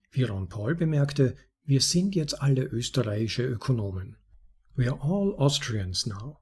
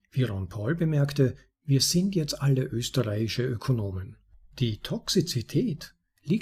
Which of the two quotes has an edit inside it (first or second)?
second